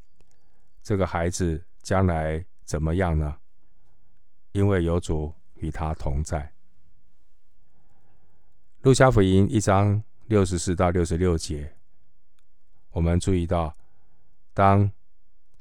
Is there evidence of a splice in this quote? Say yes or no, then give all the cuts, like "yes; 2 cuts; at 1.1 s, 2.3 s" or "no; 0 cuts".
no; 0 cuts